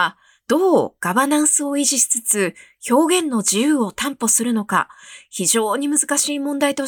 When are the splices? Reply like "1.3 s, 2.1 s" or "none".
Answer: none